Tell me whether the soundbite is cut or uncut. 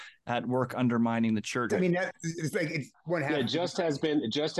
cut